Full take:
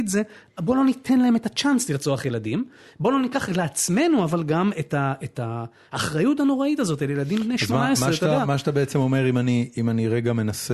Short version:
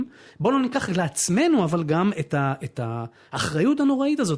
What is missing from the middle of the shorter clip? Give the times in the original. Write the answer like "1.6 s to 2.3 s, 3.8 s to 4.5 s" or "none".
none